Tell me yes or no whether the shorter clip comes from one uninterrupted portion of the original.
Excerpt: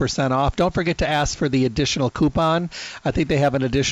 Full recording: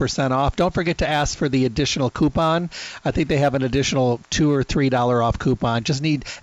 yes